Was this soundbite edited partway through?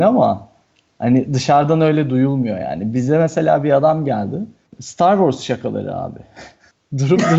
yes; 1 cut; at 4.7 s

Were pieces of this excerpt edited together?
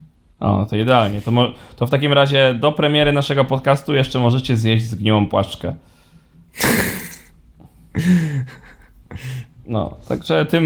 no; 0 cuts

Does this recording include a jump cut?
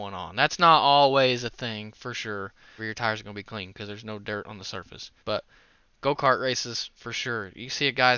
yes; 2 cuts; at 2.8 s, 5.2 s

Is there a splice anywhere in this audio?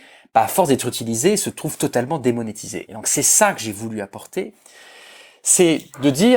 yes; 1 cut; at 2.9 s

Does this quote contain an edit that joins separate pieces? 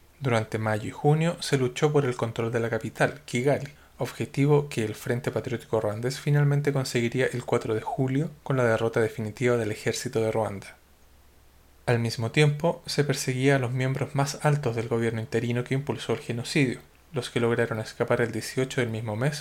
no; 0 cuts

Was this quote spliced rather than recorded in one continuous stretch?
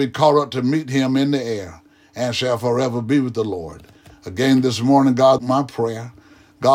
yes; 1 cut; at 5.4 s

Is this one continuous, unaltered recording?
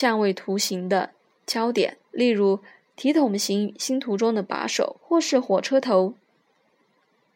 no; 2 cuts; at 2.0 s, 5.0 s

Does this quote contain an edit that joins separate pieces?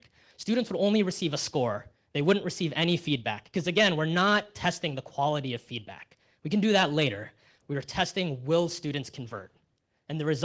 no; 0 cuts

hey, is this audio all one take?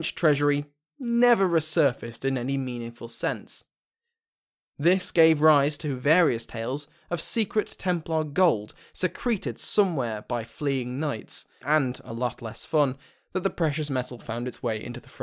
no; 1 cut; at 11.6 s

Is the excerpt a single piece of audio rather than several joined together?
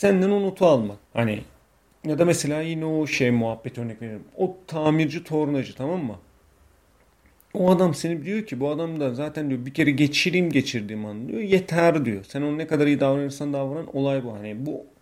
no; 1 cut; at 1.0 s

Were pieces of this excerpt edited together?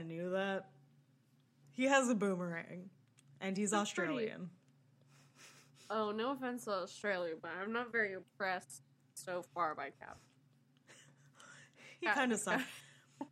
yes; 1 cut; at 1.6 s

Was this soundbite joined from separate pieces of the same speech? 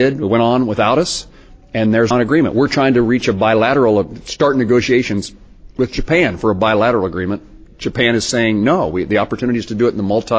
yes; 1 cut; at 2.1 s

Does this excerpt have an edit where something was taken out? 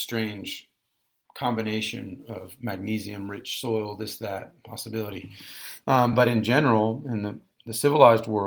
no; 0 cuts

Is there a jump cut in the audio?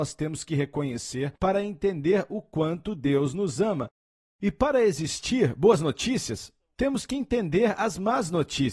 no; 0 cuts

